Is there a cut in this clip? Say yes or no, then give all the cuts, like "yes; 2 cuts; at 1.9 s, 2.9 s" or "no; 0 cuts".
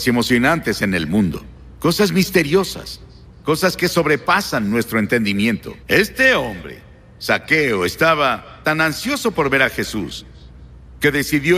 yes; 1 cut; at 5.8 s